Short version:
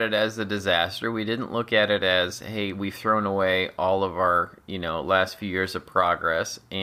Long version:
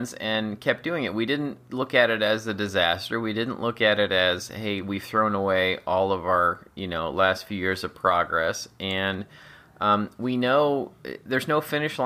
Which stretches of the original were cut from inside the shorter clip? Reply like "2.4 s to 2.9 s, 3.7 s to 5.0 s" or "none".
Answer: none